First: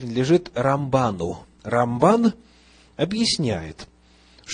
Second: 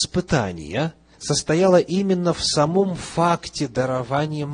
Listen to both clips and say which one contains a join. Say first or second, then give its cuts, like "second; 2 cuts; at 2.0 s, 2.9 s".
second; 1 cut; at 1.1 s